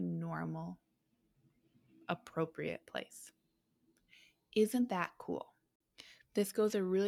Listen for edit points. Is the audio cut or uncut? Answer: uncut